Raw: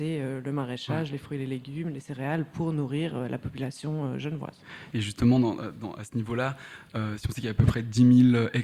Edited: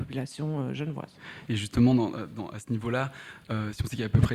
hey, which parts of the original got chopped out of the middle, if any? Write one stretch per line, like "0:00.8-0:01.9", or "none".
none

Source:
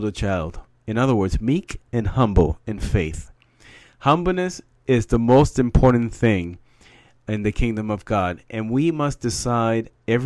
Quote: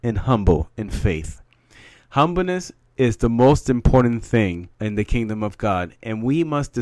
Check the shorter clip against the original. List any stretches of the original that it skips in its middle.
0:06.6-0:07.2

